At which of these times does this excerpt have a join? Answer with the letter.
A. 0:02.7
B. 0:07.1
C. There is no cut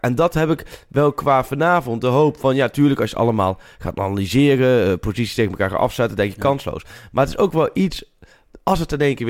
C